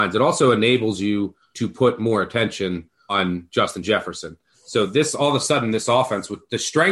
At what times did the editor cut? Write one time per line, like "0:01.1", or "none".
none